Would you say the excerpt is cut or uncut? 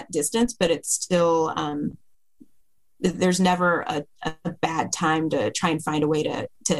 uncut